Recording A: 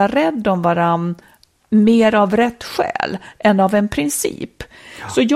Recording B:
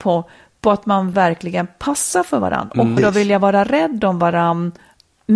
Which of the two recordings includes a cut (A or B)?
B